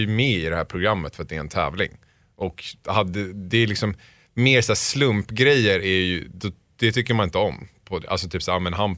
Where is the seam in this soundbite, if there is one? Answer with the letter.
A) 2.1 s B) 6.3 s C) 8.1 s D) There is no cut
D